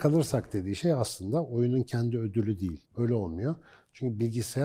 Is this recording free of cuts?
no; 1 cut; at 2.9 s

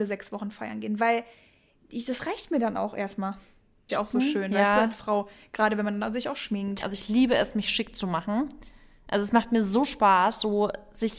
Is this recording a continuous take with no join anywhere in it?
no; 2 cuts; at 3.9 s, 6.8 s

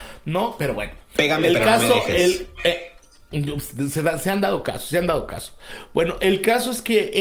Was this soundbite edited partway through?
no; 0 cuts

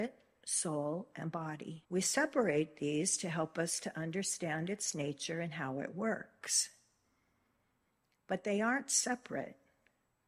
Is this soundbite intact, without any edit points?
no; 1 cut; at 1.8 s

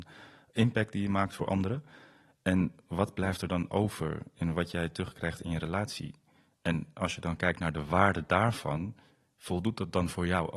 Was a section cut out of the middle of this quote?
no; 0 cuts

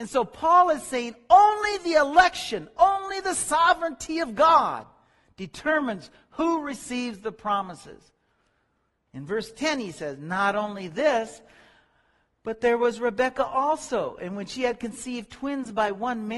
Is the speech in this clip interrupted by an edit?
yes; 1 cut; at 9.1 s

